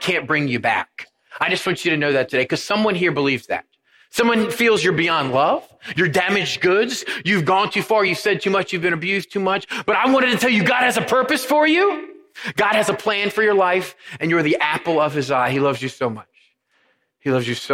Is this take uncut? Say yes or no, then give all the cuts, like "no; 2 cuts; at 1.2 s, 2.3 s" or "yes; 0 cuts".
yes; 0 cuts